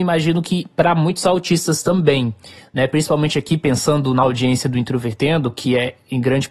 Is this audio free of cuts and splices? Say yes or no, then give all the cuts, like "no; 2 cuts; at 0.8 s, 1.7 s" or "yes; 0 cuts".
yes; 0 cuts